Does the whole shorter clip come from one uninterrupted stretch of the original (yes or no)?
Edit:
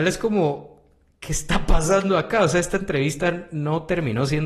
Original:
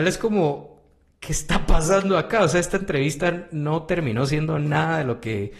yes